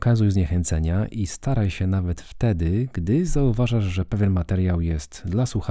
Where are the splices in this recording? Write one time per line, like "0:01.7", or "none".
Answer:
none